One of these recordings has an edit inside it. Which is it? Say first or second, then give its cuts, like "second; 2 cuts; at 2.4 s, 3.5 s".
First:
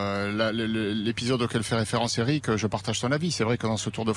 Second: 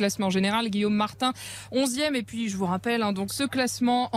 second; 1 cut; at 3.3 s